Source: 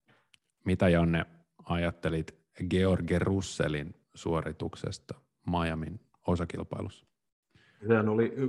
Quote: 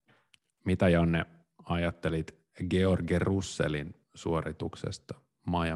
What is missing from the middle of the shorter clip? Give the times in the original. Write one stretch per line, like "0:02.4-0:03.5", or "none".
none